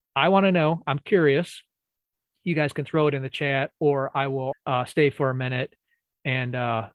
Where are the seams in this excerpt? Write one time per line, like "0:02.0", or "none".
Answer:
0:04.5